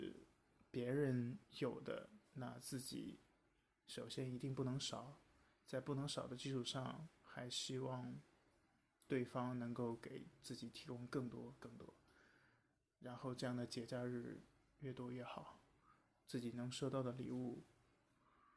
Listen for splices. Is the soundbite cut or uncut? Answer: cut